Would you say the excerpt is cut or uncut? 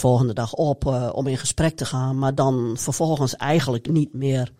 uncut